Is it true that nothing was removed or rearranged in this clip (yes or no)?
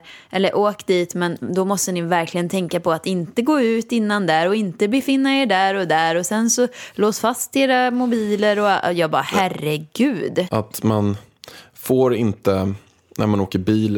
no